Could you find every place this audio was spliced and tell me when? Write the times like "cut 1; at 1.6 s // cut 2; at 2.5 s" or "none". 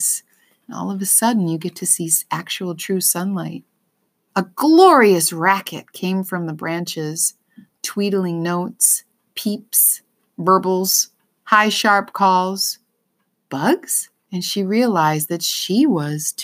cut 1; at 4.3 s // cut 2; at 14.2 s